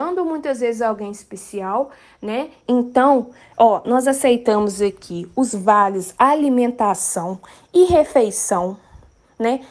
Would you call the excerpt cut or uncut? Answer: cut